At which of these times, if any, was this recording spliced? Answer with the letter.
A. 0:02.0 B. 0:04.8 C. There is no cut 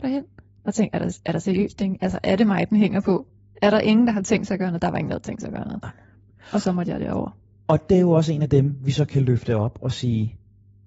C